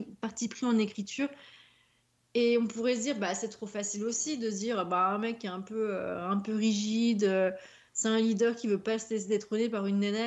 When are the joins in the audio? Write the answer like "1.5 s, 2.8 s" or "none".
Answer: none